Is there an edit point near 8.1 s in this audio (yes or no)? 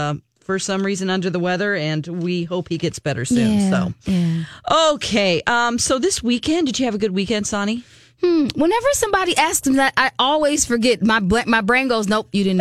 no